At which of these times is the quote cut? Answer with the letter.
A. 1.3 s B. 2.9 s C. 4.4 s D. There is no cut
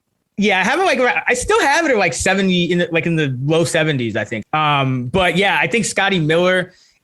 C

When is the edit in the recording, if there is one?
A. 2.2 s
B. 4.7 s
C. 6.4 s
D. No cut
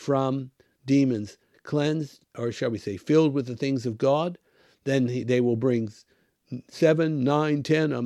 D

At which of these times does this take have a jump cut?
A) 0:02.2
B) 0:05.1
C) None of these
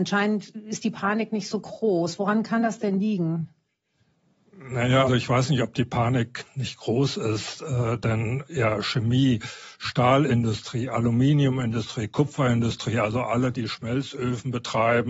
B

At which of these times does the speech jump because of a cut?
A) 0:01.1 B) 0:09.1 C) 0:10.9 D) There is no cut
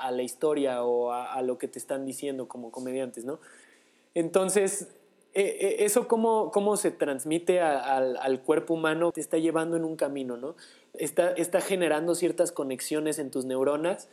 B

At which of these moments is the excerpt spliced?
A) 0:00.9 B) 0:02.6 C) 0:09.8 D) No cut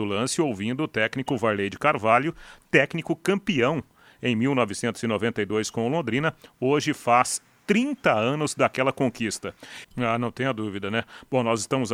C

